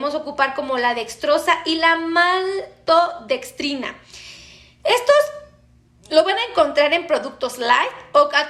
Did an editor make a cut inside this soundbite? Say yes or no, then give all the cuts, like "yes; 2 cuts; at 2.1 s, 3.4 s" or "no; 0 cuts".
no; 0 cuts